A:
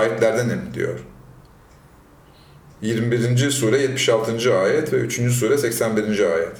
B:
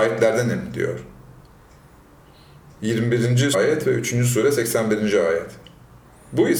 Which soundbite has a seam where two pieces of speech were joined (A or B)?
B